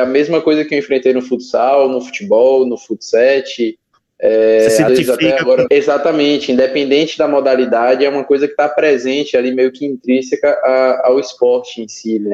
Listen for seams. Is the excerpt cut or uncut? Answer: cut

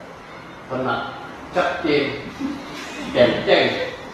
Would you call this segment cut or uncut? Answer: uncut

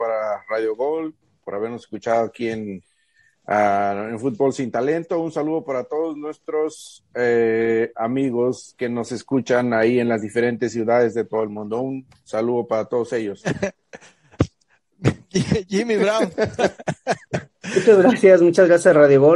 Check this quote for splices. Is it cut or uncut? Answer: uncut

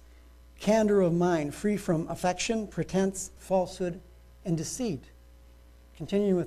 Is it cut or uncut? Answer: cut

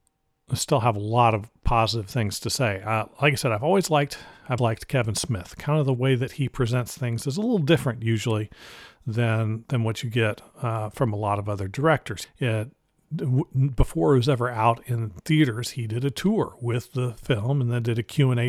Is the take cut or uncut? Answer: cut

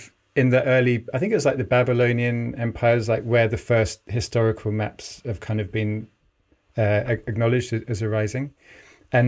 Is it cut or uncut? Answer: uncut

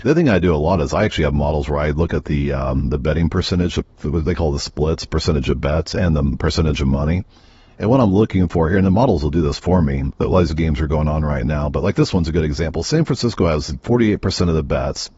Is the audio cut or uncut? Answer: cut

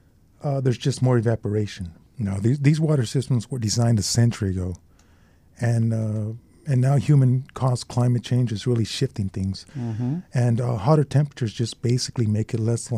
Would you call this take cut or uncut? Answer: cut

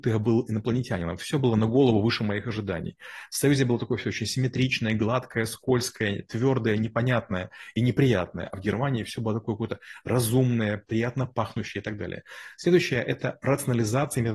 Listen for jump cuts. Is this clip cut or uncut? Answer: uncut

